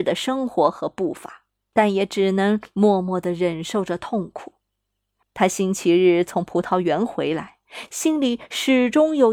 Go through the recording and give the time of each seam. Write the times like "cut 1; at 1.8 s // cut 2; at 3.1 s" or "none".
cut 1; at 1.7 s // cut 2; at 5.2 s // cut 3; at 7.9 s